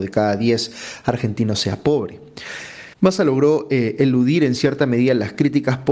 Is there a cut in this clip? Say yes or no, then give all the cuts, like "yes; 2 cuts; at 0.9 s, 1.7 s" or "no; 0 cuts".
yes; 1 cut; at 2.9 s